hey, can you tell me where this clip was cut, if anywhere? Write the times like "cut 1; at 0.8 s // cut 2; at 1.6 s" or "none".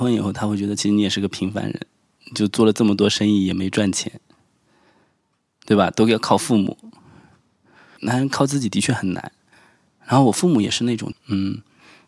cut 1; at 8.0 s // cut 2; at 11.1 s